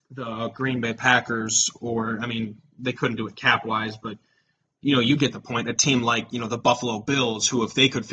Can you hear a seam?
no; 0 cuts

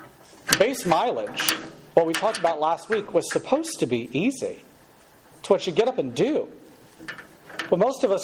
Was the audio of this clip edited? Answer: no; 0 cuts

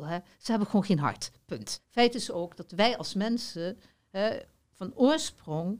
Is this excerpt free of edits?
no; 1 cut; at 1.8 s

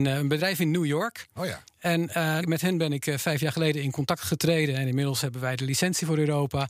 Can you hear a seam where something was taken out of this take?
yes; 1 cut; at 2.4 s

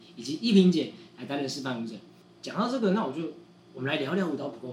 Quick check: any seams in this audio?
no; 0 cuts

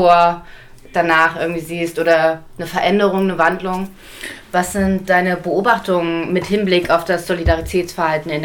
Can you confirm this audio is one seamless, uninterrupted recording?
no; 1 cut; at 4.4 s

